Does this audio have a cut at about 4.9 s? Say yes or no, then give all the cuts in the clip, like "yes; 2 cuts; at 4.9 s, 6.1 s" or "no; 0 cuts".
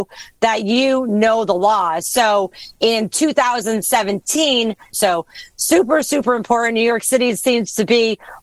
yes; 1 cut; at 4.9 s